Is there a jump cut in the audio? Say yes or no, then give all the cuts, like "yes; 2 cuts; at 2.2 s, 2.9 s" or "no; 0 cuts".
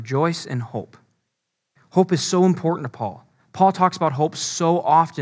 no; 0 cuts